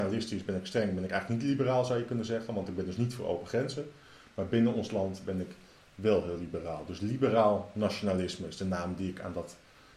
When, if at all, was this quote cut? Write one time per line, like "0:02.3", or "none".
none